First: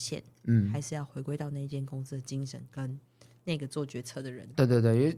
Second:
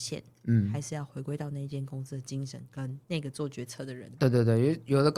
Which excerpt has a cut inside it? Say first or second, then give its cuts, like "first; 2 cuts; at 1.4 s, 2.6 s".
second; 1 cut; at 3.0 s